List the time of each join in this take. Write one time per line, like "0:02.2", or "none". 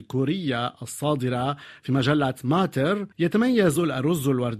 0:03.1